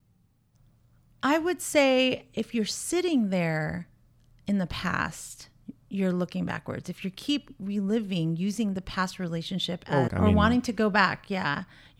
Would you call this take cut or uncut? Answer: cut